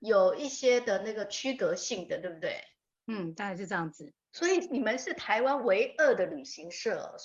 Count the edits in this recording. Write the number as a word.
one